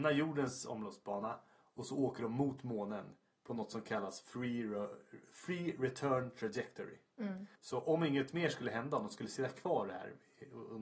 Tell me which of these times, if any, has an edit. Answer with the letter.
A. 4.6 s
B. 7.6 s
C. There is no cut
B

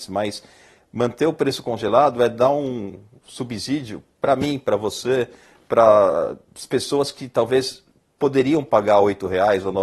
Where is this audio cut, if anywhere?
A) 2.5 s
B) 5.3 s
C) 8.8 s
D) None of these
D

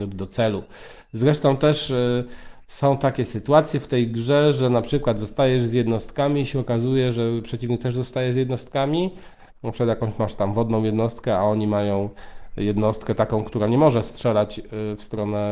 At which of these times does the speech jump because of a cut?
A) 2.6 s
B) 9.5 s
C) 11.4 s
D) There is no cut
B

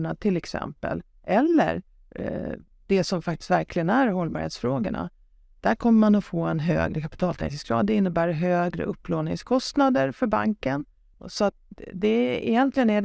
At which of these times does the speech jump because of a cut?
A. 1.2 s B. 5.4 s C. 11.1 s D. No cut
C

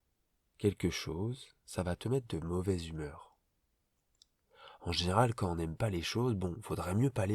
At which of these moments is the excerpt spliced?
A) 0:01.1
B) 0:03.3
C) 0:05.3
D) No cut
D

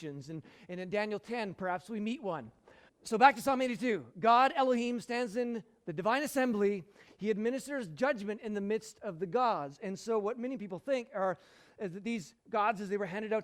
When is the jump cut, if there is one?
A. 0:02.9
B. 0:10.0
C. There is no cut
A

